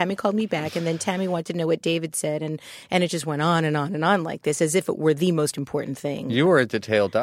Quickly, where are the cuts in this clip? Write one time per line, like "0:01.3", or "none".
none

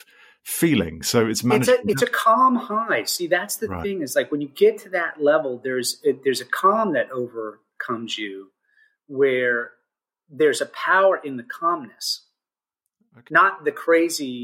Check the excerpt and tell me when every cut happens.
none

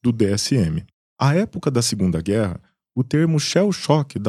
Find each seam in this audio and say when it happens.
0:01.1

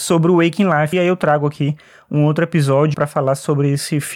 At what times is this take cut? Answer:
0:00.9
0:02.9

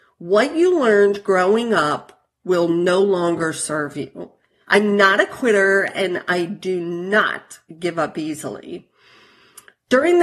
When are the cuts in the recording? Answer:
0:04.6

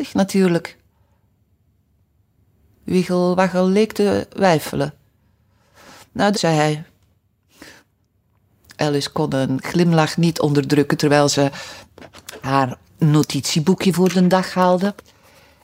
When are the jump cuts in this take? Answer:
0:06.3

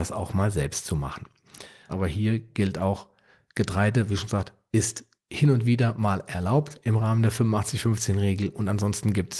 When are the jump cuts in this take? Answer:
0:01.9

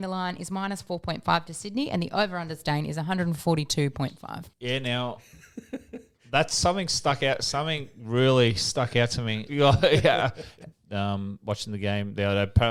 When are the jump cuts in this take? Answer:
0:04.5
0:09.5
0:10.7

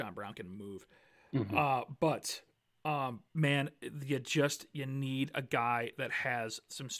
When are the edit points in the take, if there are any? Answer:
0:03.3

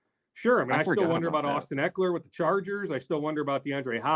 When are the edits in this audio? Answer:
none

